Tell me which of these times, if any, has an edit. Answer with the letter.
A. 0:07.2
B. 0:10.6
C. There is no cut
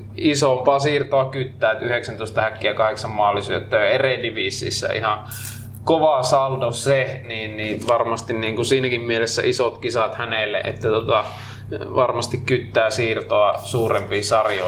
B